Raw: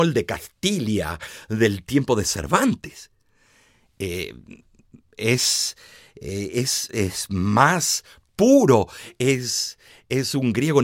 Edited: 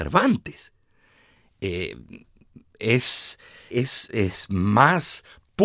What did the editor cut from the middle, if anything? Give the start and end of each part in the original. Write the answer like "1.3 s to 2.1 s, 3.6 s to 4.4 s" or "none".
6.1 s to 6.5 s

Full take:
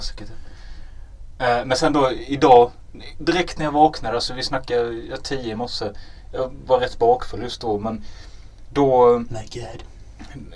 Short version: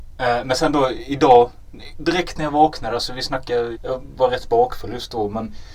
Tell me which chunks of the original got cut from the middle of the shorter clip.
5.0 s to 6.2 s

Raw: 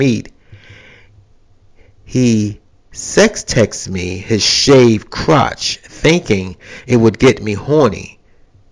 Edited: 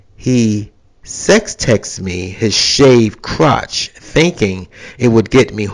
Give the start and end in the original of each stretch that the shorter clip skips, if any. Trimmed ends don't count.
none

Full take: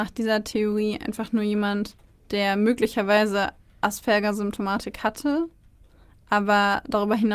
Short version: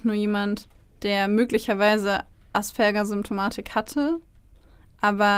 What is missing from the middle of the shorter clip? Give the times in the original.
none

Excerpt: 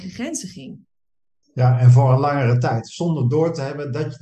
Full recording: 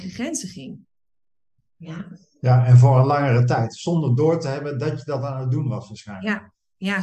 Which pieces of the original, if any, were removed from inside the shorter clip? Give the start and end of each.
1.4 s to 2.3 s

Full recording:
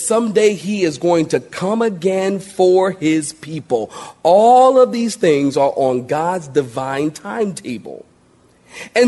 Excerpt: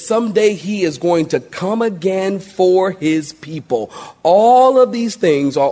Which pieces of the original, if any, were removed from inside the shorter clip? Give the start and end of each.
none

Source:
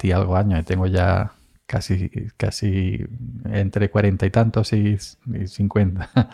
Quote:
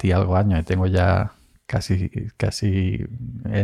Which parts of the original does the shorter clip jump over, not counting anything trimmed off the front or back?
none

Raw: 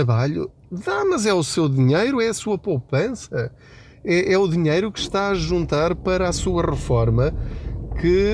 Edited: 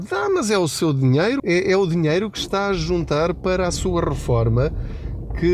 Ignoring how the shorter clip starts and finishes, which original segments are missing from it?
2.2 s to 4.0 s

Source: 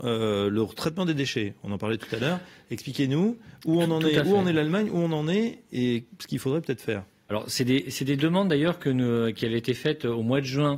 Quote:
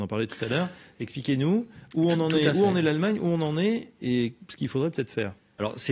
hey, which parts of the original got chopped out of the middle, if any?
none

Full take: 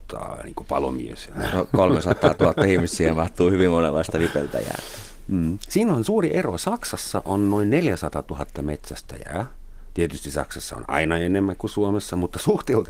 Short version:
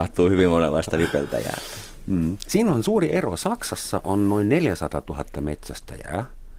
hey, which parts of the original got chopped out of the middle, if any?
none

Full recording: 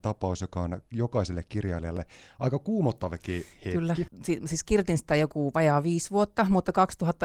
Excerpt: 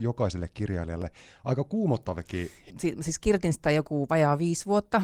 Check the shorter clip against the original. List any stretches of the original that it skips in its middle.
3.6 s to 4.1 s

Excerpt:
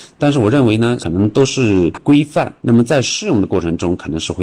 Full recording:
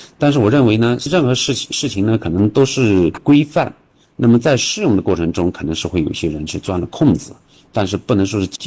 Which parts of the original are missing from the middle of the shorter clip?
1.0 s to 2.2 s, 3.8 s to 4.1 s

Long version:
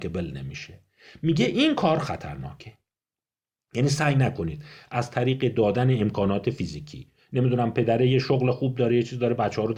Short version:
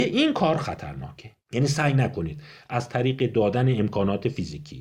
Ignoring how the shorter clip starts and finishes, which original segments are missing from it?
2.8 s to 3.6 s

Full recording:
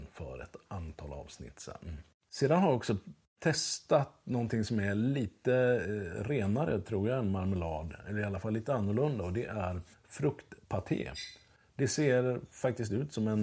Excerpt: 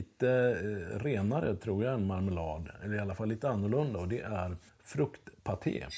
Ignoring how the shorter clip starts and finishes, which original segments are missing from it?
none

